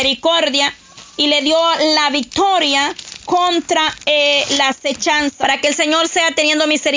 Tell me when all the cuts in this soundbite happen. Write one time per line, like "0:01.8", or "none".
0:05.4